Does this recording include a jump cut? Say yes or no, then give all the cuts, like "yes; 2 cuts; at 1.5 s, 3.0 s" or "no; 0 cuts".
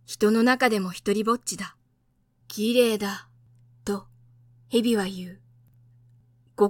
yes; 1 cut; at 2.4 s